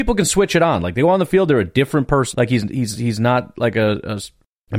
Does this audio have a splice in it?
yes; 1 cut; at 2.3 s

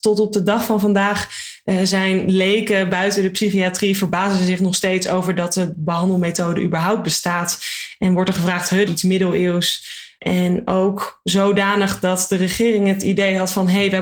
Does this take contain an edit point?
yes; 2 cuts; at 8.9 s, 10.2 s

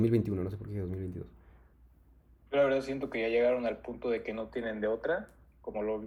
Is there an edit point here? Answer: no; 0 cuts

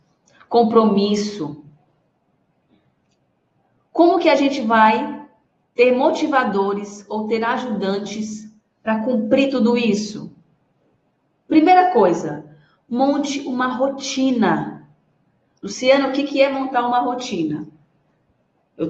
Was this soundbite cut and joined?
no; 0 cuts

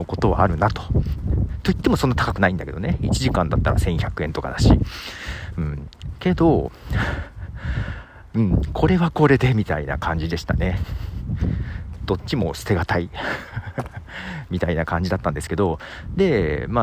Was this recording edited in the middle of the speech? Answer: no; 0 cuts

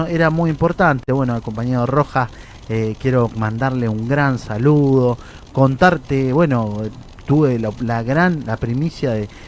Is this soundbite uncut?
yes; 0 cuts

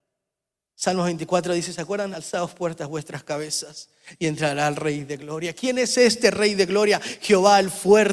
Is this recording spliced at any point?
no; 0 cuts

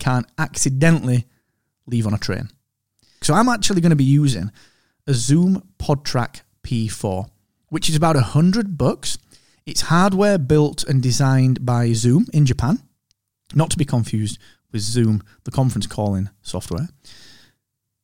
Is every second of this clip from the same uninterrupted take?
no; 1 cut; at 3.2 s

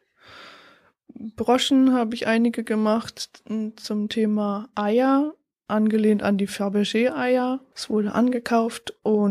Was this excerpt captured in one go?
no; 1 cut; at 7.7 s

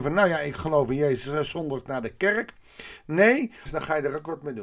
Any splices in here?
yes; 1 cut; at 3.7 s

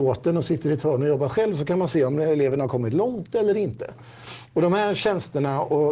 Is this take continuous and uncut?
yes; 0 cuts

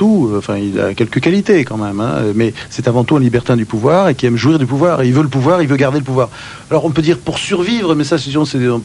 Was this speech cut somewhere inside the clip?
no; 0 cuts

